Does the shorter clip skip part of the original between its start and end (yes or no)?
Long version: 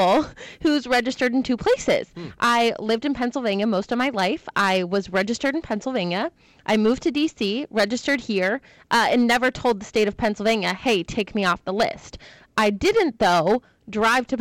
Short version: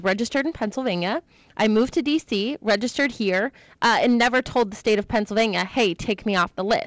no